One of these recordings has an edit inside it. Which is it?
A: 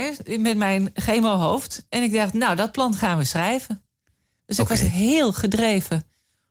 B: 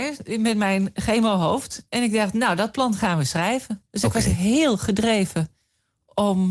B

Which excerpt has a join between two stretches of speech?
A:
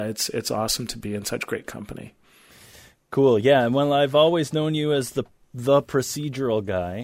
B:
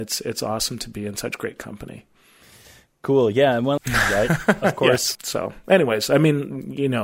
B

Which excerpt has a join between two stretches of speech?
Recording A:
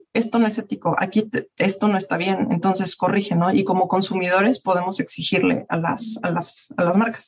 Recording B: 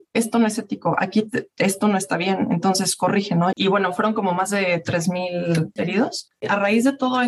B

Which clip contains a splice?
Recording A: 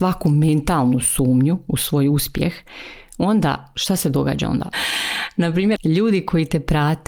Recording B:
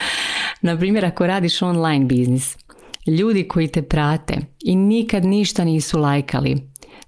A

